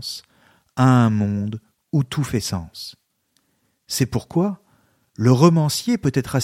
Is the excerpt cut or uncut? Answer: uncut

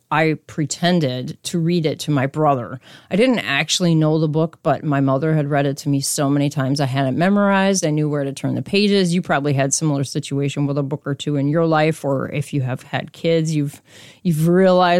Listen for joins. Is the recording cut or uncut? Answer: uncut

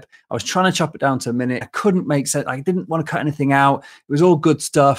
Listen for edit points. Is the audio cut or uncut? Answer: cut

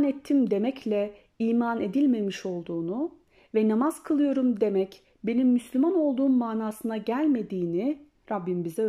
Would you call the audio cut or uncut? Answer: uncut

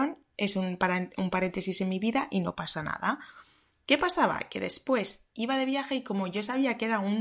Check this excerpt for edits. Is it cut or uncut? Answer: uncut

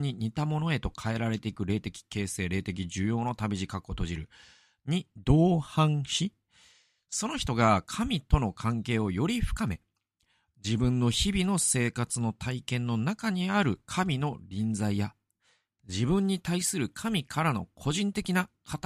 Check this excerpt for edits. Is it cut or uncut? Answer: cut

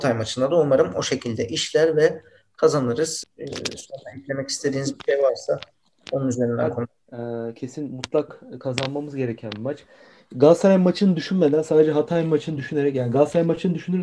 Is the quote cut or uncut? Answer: cut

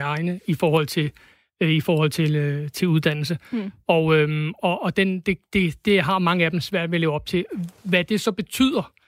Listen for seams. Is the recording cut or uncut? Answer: uncut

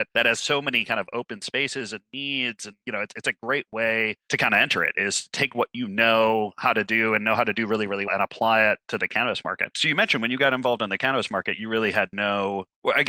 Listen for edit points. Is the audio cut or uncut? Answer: cut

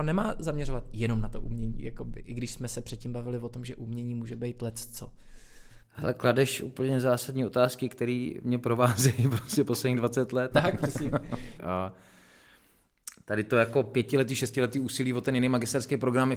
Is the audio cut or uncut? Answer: cut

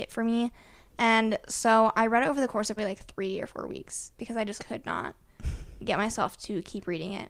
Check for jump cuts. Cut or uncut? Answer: cut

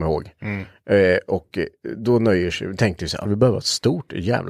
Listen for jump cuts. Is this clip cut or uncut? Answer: cut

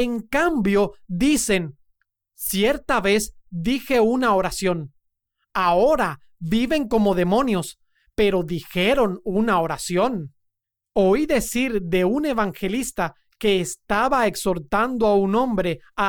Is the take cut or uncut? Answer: uncut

